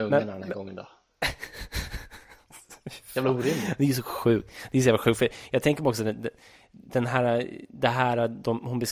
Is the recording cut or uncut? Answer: uncut